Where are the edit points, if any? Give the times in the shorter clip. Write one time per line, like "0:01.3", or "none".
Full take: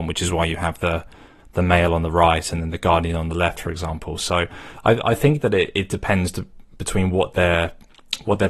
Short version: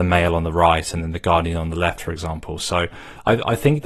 none

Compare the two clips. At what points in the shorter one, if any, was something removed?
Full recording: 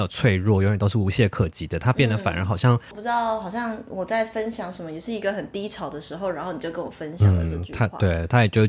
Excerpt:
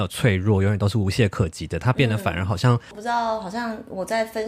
none

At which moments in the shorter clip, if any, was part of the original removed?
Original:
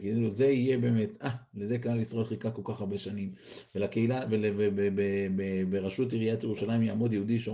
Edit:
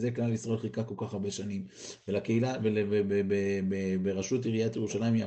none

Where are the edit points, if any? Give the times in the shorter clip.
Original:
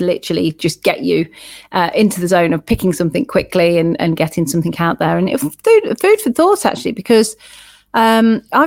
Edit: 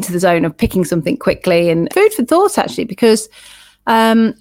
0:01.9

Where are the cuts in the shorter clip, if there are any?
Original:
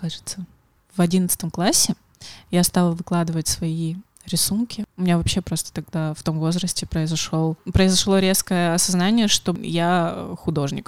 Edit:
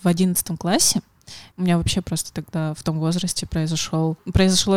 0:01.5

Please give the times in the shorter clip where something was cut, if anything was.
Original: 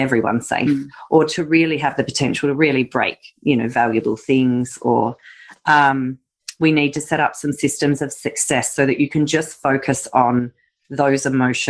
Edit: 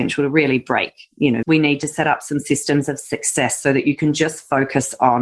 0:01.4

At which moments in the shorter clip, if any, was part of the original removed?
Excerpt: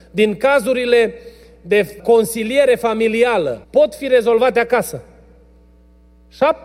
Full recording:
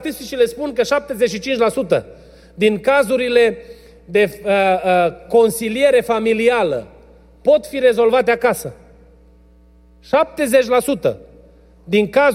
0:02.0
0:03.6

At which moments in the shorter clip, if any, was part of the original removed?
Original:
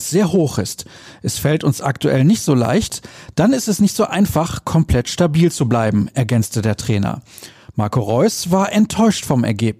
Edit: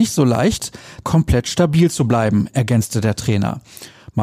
0:01.0

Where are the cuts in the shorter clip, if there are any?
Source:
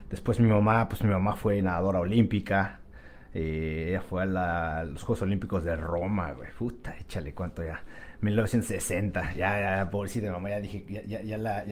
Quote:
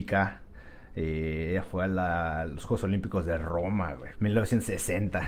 0:04.1

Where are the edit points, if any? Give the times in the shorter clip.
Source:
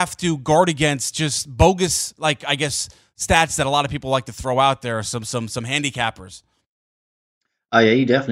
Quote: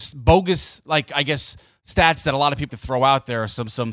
0:02.7

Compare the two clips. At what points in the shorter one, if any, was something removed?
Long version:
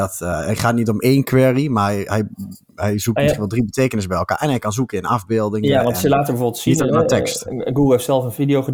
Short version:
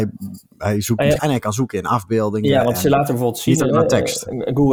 0:01.2

